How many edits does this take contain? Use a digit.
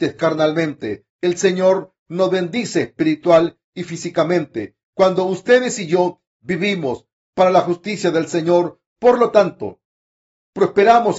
1